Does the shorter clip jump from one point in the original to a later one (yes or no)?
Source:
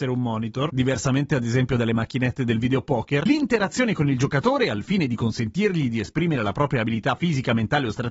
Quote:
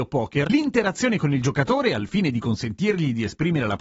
no